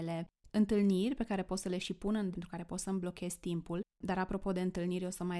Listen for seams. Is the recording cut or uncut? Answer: cut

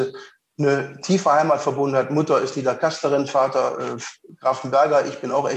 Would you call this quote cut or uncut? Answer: uncut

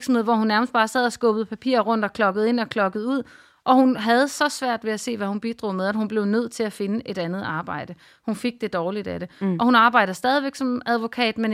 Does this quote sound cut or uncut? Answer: uncut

